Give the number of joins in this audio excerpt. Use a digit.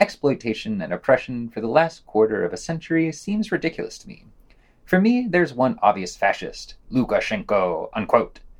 0